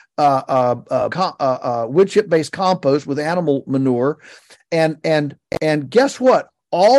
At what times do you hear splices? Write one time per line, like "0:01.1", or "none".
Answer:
0:01.1